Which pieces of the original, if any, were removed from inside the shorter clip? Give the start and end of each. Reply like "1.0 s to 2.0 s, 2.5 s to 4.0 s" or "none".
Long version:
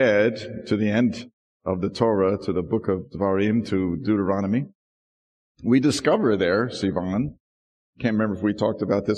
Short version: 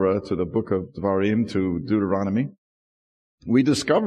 none